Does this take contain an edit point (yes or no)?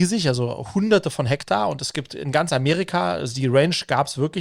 no